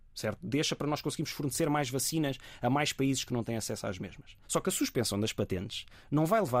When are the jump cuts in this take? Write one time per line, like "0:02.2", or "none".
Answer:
0:04.4